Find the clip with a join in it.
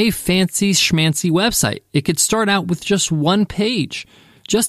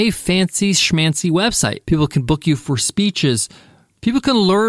second; 1 cut; at 1.8 s

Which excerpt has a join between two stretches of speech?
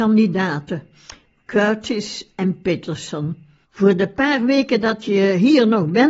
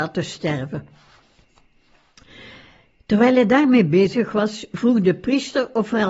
first; 2 cuts; at 1.3 s, 3.6 s

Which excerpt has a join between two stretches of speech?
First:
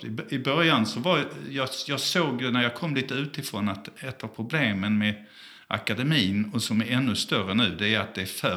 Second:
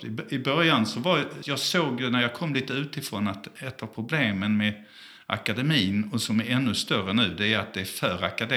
second; 1 cut; at 1.4 s

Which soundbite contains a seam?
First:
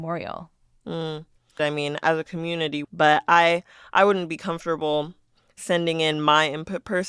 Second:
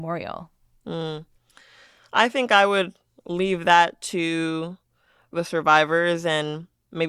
first; 2 cuts; at 1.6 s, 2.8 s

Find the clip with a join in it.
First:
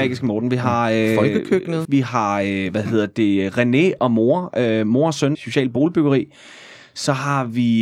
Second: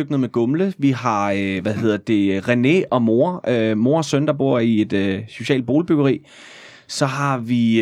first; 2 cuts; at 1.8 s, 5.3 s

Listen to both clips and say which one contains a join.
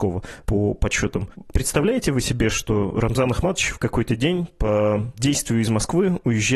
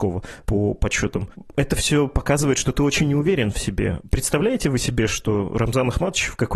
first; 1 cut; at 1.5 s

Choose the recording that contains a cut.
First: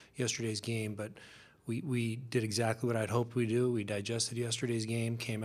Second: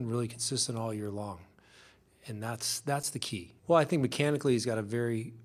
second; 1 cut; at 3.6 s

